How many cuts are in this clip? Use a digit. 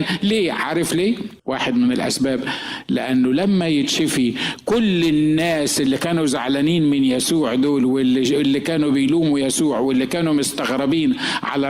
1